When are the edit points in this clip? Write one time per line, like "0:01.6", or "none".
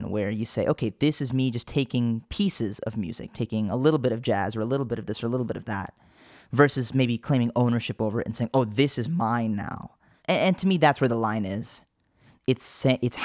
none